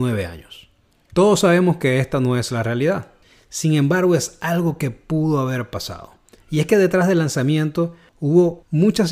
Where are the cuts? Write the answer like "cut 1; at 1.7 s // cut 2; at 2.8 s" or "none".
cut 1; at 1.1 s